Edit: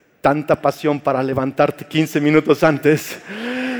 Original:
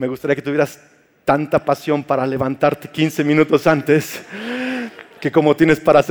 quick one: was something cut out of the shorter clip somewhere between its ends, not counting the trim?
no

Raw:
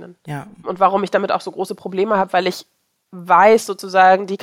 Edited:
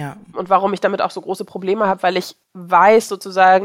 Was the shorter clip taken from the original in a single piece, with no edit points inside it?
no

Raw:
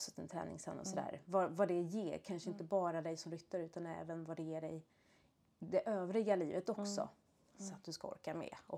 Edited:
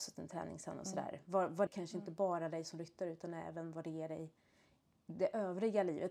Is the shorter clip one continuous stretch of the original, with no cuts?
no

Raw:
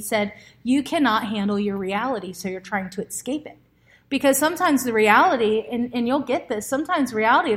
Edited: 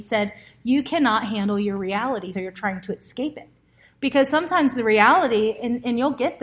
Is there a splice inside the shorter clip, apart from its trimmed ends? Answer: yes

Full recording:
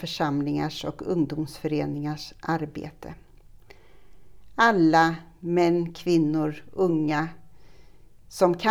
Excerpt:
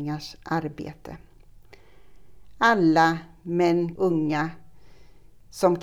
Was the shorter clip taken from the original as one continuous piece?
no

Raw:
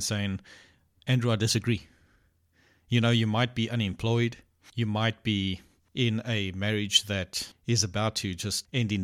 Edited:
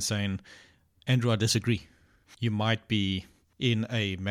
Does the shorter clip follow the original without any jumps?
no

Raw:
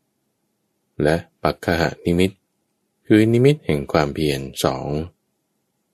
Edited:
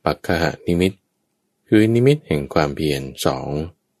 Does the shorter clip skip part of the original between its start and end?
no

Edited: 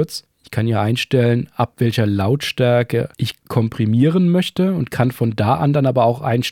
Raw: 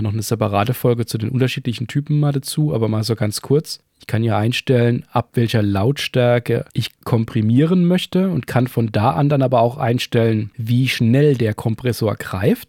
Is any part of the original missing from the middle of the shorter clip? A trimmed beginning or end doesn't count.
no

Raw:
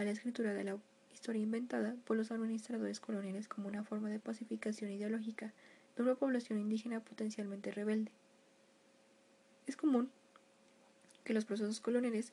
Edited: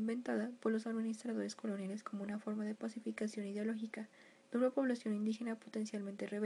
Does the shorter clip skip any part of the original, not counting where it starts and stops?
no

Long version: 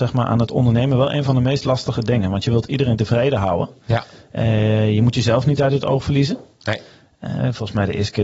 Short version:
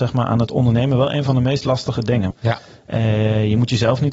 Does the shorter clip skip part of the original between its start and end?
yes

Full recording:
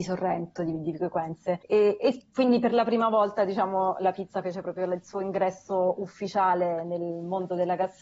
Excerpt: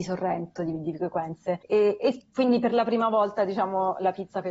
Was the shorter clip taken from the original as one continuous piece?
yes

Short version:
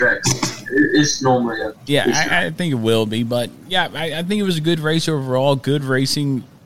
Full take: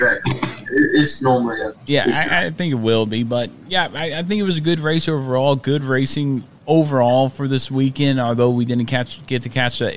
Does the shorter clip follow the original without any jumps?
yes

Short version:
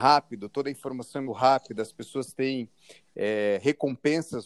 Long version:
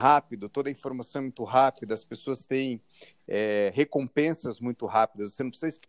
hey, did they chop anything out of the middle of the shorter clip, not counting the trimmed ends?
yes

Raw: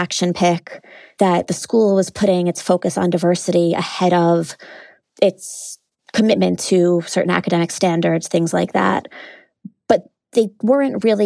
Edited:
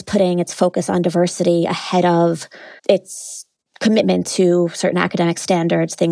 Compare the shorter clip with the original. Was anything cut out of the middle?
yes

